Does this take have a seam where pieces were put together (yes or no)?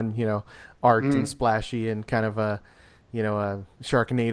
no